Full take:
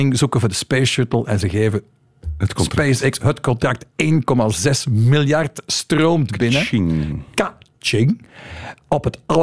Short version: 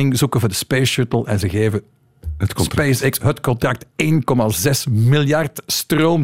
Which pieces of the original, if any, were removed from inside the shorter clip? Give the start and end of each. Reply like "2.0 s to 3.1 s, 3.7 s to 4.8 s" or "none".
none

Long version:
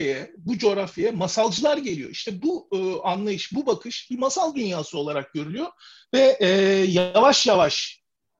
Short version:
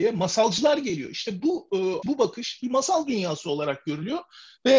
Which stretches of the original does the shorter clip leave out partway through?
3.0 s to 3.5 s

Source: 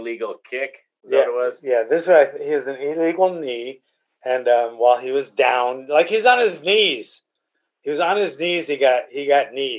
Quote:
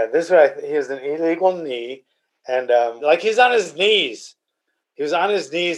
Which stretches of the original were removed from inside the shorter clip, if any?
4.8 s to 5.9 s

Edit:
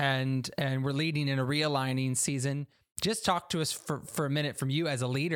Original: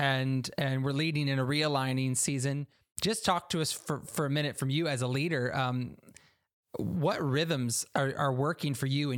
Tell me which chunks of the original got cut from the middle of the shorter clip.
none

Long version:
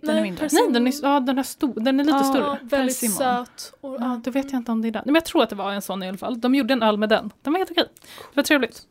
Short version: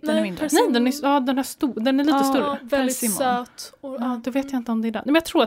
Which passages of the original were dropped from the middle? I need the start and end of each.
none

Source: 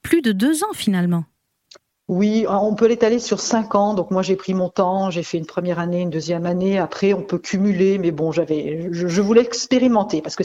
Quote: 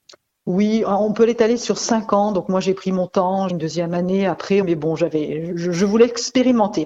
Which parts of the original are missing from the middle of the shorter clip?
5.1 s to 6.0 s, 7.1 s to 8.0 s

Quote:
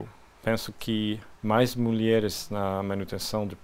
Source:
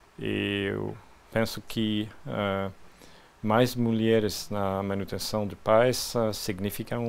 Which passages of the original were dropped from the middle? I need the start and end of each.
2.2 s to 3.3 s

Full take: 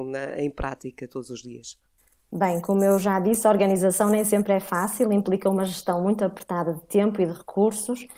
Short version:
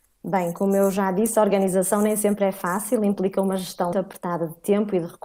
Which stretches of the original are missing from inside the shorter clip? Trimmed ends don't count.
6.0 s to 6.2 s

